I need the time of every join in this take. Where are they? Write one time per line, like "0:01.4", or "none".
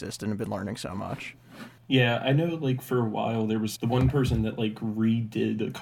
0:01.8
0:03.8